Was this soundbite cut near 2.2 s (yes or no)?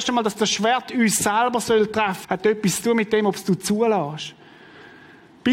yes